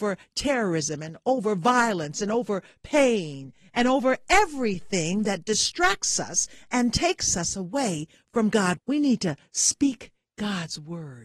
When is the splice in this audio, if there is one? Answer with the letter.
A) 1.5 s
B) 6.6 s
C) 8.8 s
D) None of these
C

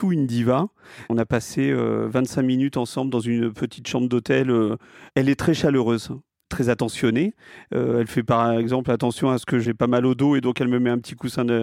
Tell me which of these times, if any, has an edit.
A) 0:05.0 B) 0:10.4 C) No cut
C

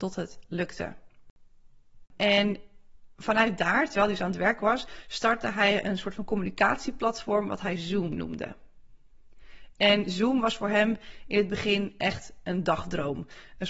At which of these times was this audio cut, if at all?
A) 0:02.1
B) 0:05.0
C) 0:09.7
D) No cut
A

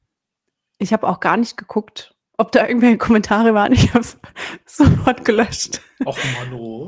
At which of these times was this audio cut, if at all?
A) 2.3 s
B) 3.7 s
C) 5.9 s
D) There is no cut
A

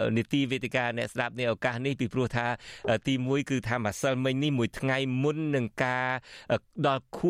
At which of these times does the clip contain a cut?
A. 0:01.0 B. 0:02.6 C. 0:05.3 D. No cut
D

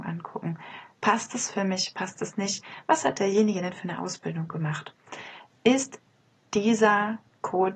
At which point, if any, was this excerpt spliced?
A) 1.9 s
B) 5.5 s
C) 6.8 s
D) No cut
B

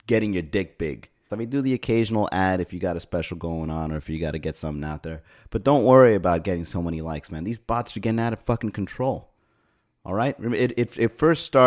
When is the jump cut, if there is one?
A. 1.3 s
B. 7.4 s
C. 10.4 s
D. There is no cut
A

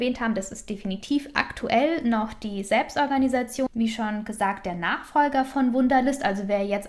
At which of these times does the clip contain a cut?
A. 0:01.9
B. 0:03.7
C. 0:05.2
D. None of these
B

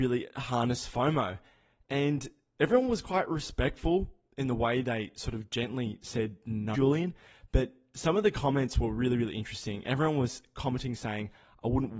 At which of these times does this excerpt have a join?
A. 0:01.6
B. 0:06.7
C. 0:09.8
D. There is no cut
B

